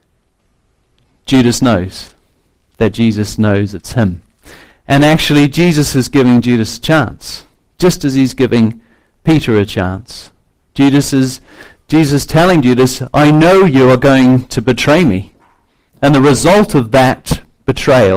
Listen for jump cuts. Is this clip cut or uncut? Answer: uncut